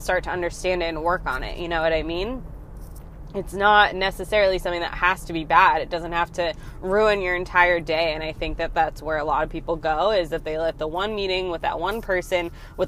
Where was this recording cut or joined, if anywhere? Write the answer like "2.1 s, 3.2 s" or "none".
none